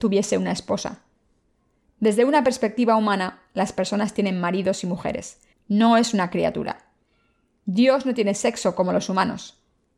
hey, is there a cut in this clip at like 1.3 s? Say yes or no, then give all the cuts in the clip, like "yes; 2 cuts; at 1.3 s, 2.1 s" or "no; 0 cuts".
no; 1 cut; at 5.5 s